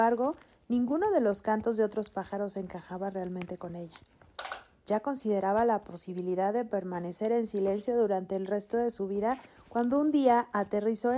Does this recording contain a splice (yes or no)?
no